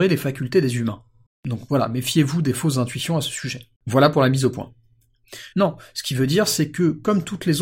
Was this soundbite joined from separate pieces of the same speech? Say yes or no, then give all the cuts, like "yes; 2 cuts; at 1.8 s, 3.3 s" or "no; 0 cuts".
yes; 3 cuts; at 1.3 s, 3.8 s, 5.5 s